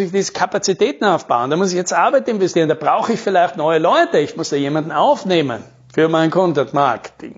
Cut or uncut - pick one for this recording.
uncut